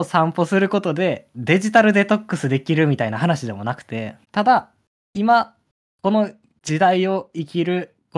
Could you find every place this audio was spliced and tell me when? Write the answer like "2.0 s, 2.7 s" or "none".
4.2 s